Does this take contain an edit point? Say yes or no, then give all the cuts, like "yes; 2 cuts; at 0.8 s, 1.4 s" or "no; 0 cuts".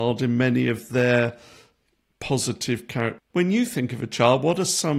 yes; 1 cut; at 3.3 s